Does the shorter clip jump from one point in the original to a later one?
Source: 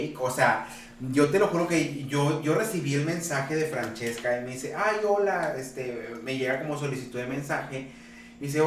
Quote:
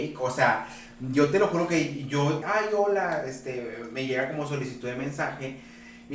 yes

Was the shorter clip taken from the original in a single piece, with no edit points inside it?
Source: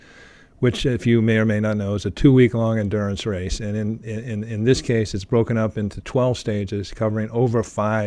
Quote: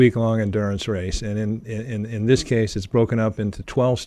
yes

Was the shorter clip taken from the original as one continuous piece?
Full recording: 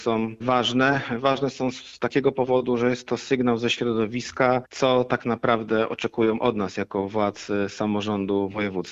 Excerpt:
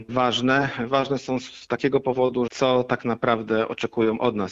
no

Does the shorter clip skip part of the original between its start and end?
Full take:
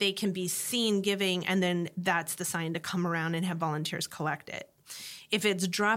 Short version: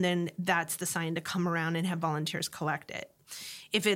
no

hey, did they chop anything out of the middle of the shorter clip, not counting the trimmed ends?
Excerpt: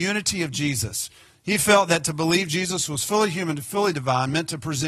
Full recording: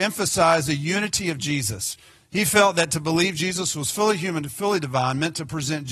no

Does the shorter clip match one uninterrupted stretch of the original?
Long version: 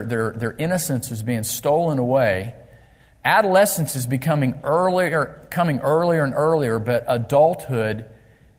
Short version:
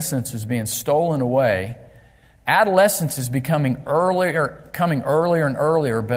yes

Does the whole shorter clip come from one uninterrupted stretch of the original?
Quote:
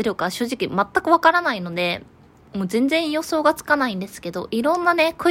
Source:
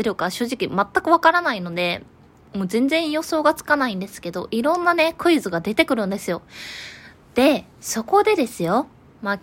yes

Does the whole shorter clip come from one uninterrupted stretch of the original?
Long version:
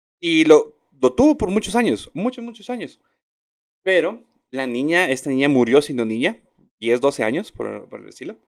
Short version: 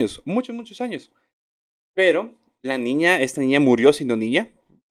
yes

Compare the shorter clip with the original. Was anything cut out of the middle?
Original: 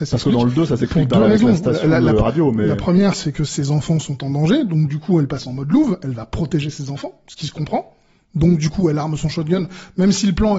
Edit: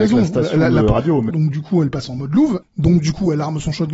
yes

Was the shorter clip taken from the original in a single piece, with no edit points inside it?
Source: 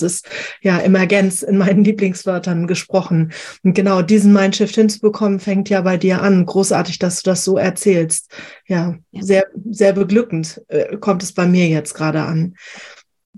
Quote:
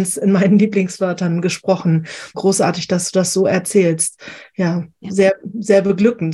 no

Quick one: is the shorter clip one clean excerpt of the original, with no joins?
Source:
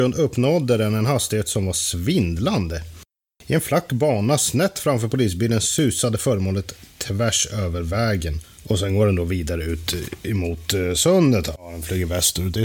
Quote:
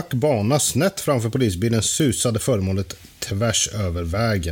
yes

